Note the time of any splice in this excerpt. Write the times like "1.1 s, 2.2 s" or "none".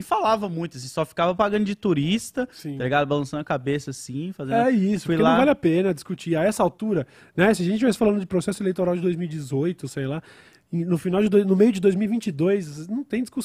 none